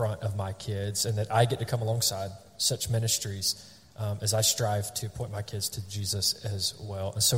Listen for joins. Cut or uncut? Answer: uncut